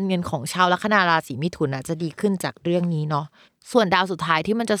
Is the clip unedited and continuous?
yes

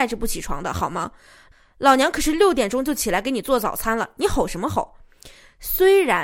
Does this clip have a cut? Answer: no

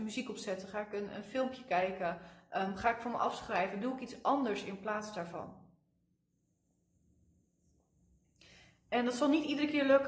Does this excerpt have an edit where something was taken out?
no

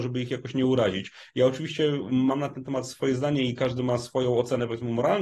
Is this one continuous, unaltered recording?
yes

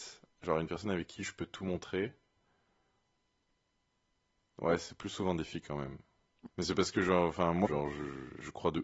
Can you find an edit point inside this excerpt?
yes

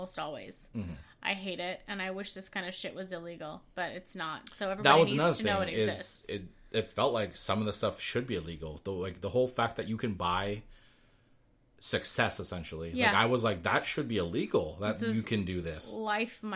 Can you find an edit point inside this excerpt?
no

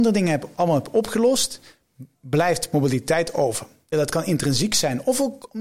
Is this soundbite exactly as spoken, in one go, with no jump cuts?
no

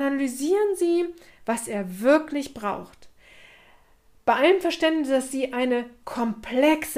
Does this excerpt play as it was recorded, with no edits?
yes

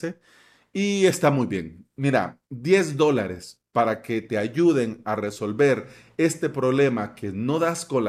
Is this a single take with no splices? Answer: yes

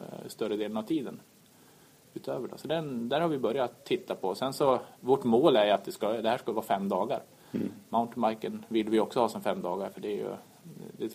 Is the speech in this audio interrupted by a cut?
no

